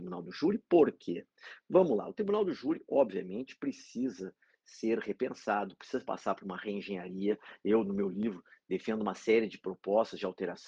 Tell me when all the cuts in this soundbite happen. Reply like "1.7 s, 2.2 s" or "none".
none